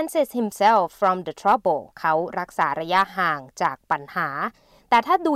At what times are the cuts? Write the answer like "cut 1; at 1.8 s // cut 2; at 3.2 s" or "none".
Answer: cut 1; at 1.9 s